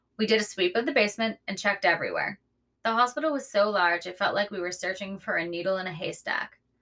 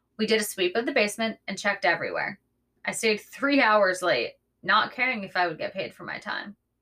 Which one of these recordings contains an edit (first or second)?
first